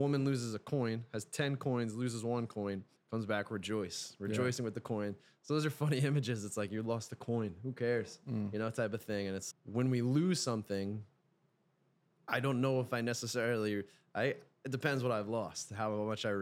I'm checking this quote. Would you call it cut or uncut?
cut